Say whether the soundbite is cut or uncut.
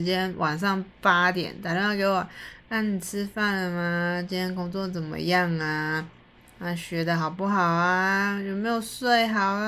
uncut